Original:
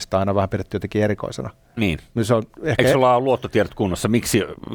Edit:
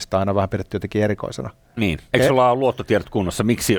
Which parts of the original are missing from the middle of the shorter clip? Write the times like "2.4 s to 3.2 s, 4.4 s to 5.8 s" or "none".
2.1 s to 2.8 s